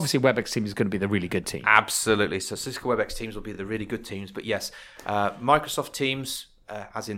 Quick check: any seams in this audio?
no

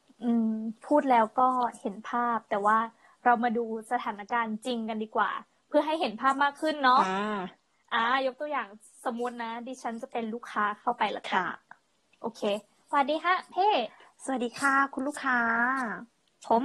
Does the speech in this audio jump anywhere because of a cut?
no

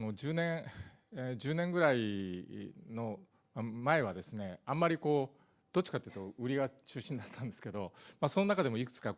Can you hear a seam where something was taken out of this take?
no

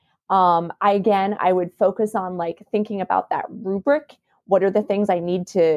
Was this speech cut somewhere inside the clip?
no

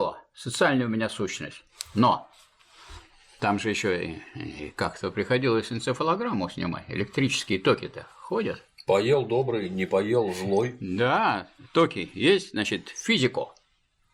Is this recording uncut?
yes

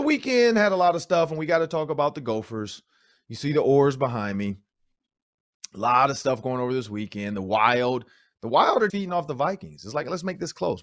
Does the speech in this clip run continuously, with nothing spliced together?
no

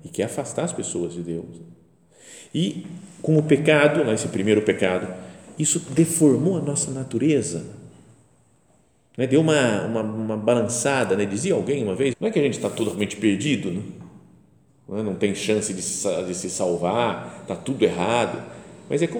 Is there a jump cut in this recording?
yes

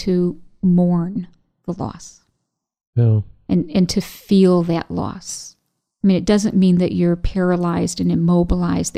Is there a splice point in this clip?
no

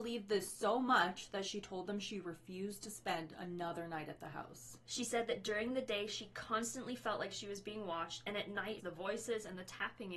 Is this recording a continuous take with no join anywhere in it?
no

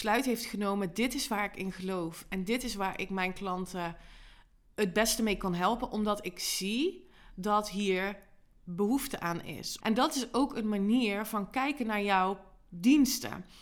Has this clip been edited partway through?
yes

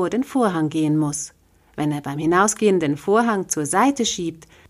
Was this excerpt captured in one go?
yes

